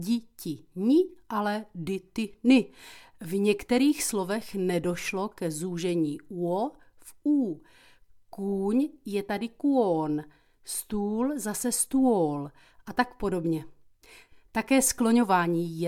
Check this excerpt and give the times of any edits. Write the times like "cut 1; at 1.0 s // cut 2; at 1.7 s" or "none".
none